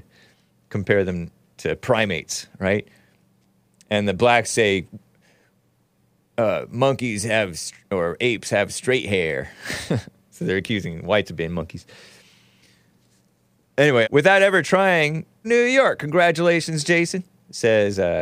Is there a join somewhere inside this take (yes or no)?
yes